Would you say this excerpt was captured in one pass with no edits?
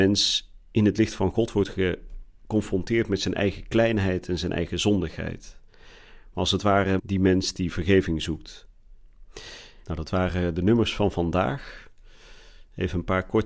no; 2 cuts; at 7.0 s, 9.8 s

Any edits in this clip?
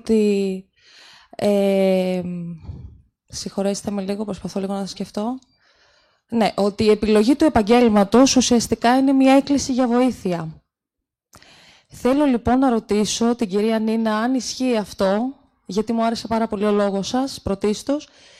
no; 0 cuts

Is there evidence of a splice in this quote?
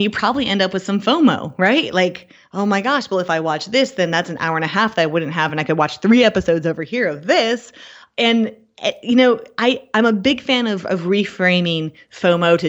no; 0 cuts

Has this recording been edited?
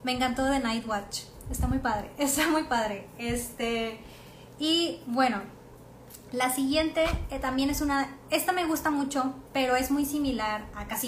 no; 0 cuts

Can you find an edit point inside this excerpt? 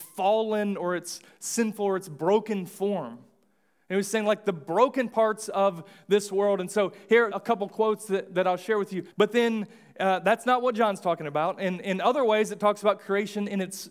yes; 2 cuts; at 7.3 s, 9.1 s

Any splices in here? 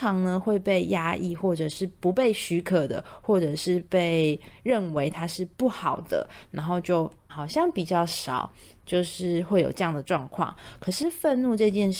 yes; 1 cut; at 7.3 s

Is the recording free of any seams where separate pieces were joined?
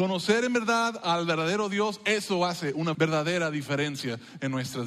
no; 1 cut; at 2.9 s

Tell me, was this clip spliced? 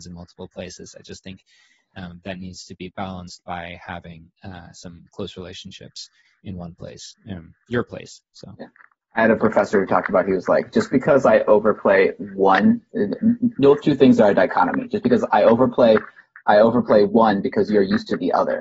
no; 0 cuts

